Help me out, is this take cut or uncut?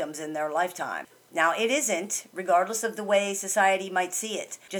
cut